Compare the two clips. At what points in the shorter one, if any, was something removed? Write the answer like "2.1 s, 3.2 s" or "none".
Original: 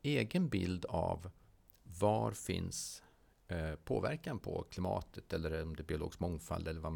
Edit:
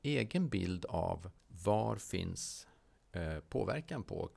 1.4 s

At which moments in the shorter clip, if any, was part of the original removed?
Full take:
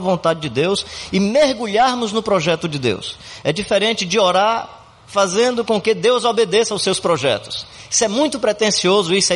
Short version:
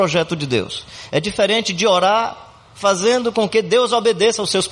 none

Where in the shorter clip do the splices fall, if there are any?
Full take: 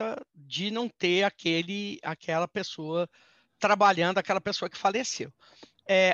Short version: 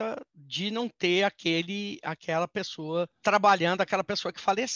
3.1 s

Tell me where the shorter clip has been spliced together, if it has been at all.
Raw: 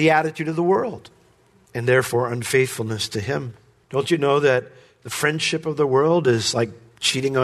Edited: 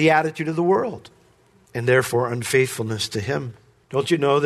none

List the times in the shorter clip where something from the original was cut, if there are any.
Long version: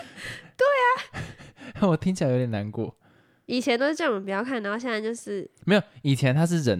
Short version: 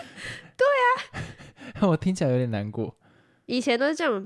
none

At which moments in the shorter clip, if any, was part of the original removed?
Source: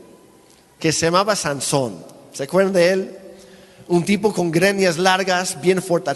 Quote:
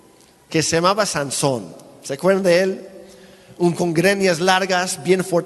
3.8 s

